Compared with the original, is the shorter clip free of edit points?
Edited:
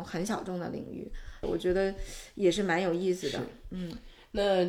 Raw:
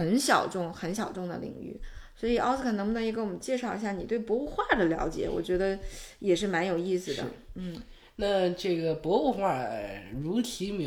no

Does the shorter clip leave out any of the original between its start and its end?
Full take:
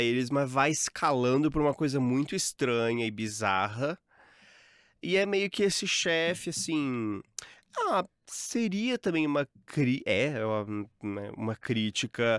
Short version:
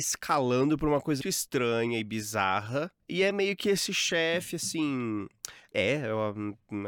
yes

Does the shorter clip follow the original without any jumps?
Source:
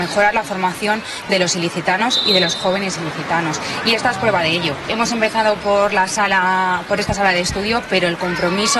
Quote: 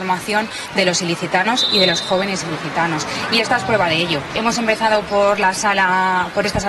yes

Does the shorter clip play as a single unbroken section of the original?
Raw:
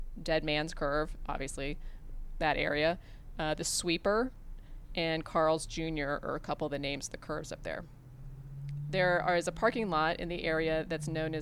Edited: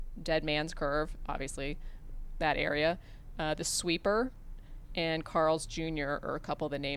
yes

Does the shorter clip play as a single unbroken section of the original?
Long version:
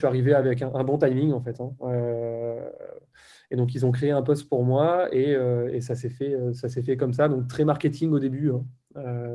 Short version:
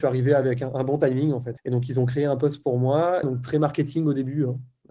no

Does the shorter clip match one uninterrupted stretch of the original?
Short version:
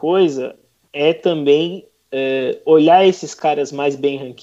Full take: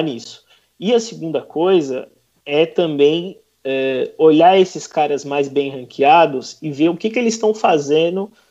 yes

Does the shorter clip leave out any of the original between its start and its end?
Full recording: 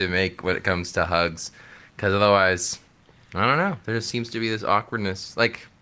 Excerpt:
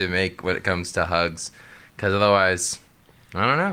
no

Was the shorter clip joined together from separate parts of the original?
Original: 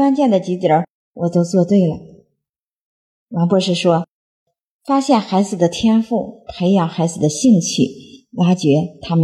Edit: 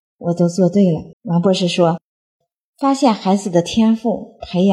yes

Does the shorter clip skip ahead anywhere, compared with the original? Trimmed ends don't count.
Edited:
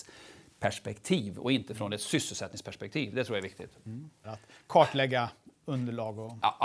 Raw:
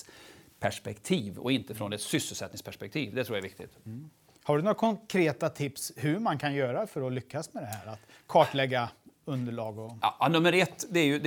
yes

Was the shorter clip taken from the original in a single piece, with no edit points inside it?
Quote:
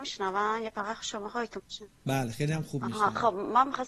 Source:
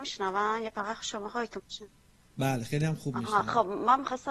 no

